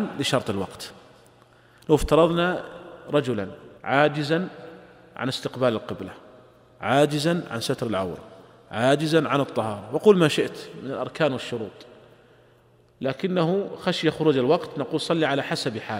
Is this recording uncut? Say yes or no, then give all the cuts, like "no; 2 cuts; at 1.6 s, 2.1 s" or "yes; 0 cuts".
no; 1 cut; at 3.8 s